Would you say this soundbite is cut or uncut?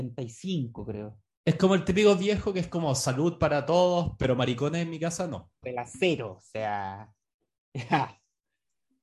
cut